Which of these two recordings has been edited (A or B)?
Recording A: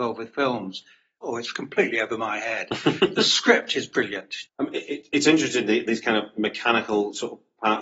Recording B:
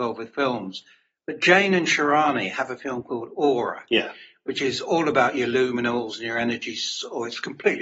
A